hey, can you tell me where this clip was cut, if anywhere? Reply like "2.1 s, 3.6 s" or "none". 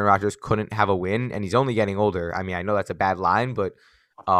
none